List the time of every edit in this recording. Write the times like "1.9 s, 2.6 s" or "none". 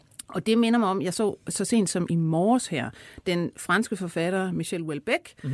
none